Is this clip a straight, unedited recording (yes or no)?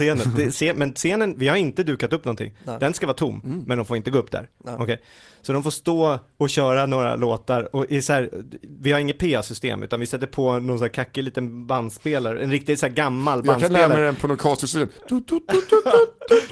yes